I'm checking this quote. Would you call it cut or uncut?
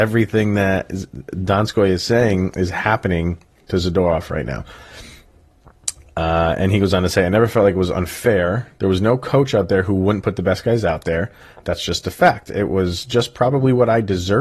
uncut